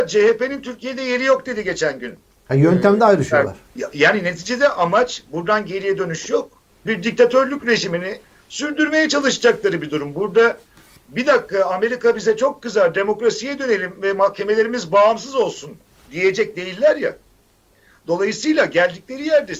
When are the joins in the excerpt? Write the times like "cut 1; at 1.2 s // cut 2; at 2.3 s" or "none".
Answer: cut 1; at 3.7 s // cut 2; at 6.9 s

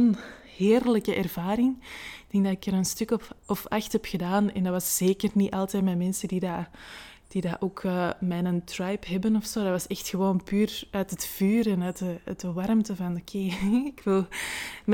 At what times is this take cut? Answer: none

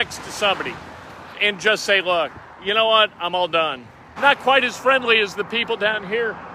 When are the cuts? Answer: cut 1; at 1.3 s // cut 2; at 4.2 s

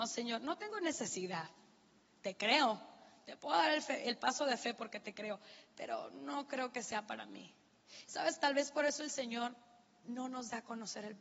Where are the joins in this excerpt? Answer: none

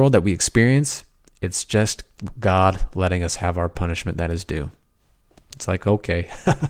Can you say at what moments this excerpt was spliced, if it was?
none

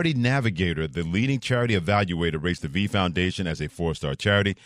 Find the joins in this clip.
none

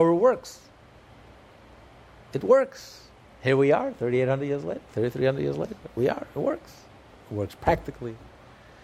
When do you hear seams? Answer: none

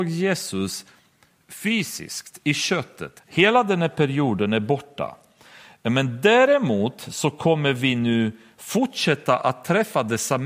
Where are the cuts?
cut 1; at 3.2 s

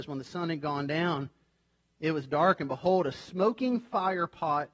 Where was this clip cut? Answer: none

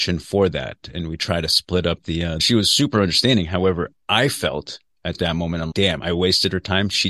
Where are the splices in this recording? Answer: cut 1; at 2.4 s // cut 2; at 5.7 s

